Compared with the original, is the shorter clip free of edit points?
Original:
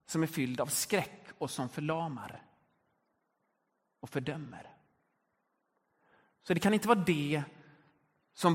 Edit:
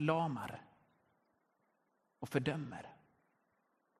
yes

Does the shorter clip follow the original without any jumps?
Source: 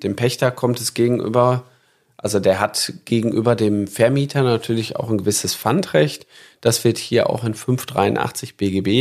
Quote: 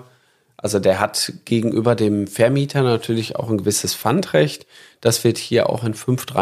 yes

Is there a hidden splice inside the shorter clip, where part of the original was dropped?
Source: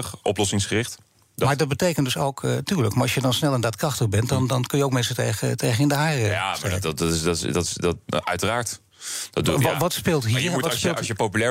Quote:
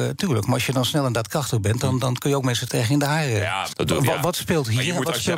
yes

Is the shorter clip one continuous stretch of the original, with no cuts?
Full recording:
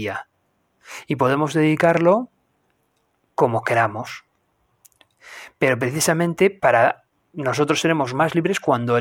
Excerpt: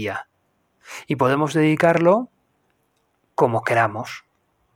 yes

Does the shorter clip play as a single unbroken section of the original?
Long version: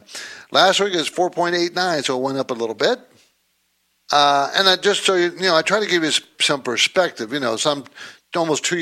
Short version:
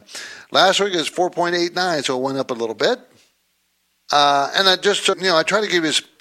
no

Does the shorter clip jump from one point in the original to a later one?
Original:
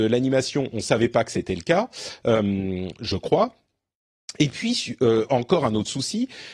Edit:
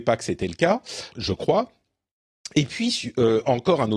yes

